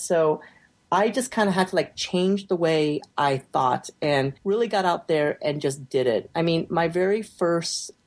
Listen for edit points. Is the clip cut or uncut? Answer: cut